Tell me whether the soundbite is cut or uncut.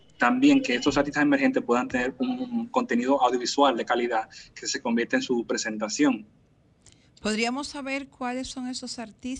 uncut